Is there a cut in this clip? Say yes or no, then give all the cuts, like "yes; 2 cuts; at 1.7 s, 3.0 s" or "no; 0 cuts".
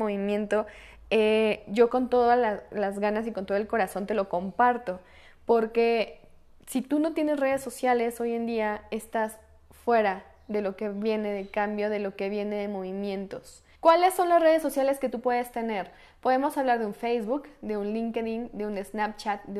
yes; 1 cut; at 13.7 s